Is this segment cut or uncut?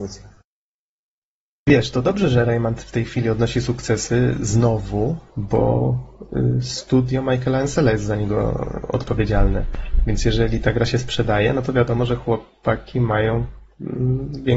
uncut